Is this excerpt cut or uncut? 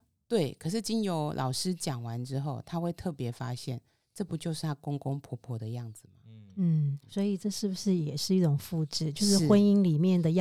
uncut